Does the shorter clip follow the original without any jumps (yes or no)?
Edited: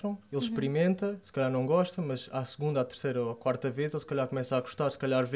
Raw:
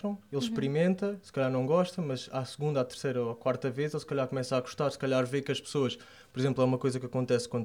yes